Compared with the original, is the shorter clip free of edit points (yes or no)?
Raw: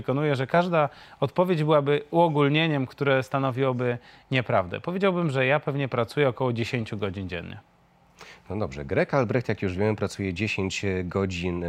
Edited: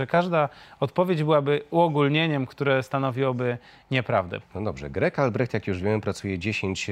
no